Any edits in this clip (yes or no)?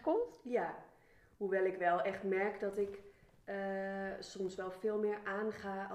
no